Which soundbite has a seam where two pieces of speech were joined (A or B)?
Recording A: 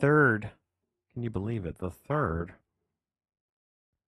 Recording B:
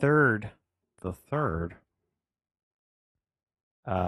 B